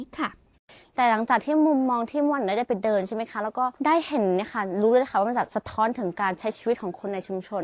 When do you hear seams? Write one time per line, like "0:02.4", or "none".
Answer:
0:03.8